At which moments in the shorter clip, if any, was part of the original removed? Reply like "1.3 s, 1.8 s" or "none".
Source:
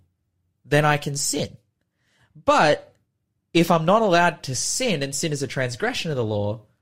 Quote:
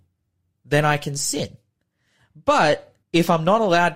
3.0 s